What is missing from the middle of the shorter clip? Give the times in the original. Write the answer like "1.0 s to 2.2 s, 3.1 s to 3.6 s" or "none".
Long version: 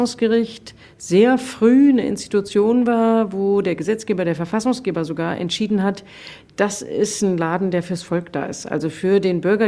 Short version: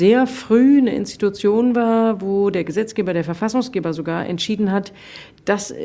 none